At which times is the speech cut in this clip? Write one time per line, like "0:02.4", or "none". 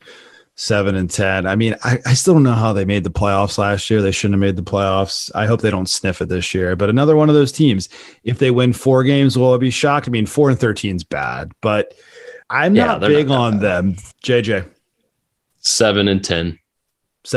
0:12.4
0:14.1